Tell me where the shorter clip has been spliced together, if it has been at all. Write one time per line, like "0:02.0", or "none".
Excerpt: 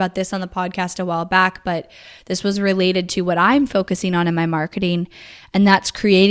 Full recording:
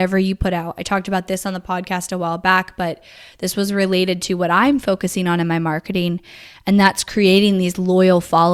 none